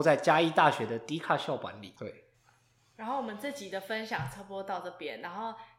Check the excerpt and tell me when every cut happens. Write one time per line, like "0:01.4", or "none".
0:02.0